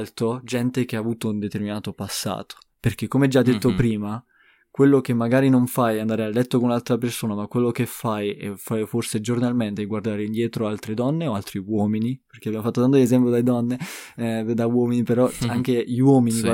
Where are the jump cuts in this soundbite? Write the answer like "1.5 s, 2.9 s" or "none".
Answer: none